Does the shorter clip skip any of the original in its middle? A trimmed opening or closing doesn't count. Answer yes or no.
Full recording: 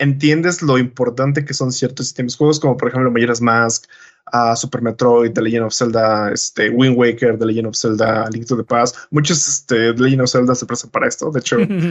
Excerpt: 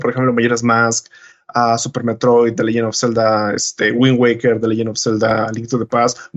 no